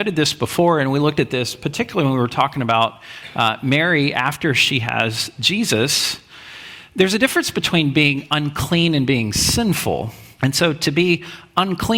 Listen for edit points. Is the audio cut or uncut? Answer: cut